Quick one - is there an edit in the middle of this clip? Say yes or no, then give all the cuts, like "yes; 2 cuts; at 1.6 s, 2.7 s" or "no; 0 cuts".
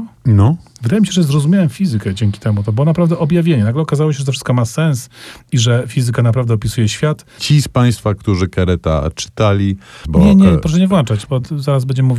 yes; 2 cuts; at 7.4 s, 10.0 s